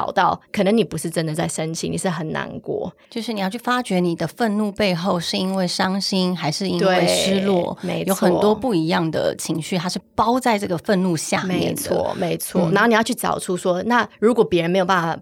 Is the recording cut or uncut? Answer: cut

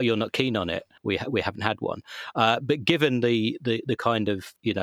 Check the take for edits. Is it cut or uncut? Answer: cut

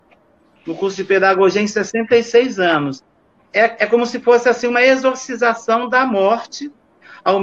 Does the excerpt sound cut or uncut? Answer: cut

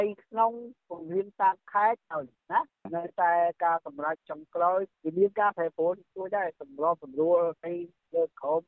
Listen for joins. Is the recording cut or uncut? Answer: cut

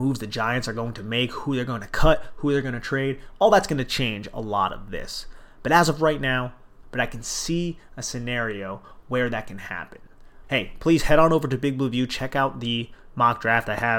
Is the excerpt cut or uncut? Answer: cut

